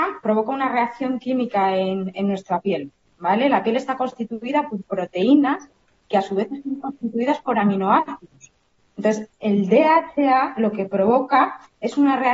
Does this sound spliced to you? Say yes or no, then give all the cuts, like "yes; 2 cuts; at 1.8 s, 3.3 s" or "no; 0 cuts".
no; 0 cuts